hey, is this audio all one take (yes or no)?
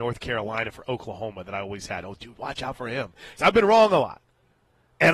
no